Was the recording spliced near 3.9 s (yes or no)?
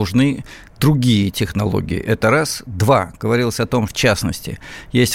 yes